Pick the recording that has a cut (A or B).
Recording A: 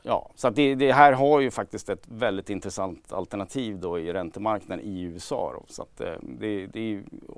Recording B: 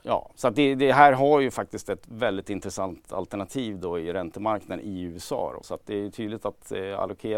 B